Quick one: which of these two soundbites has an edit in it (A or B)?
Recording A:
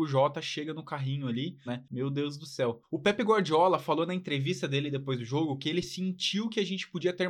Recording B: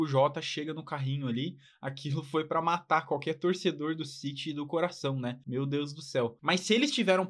A